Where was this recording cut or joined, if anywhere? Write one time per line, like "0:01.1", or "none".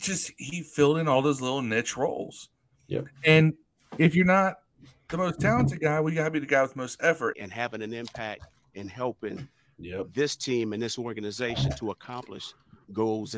0:07.3